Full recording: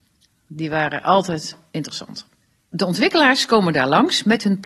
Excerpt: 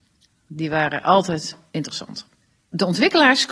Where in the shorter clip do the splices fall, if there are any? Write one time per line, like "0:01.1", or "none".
none